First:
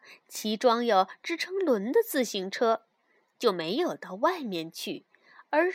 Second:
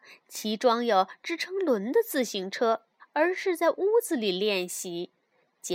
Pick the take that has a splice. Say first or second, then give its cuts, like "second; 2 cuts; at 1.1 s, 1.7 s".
second; 1 cut; at 3.0 s